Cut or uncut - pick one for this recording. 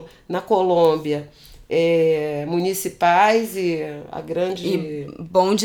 uncut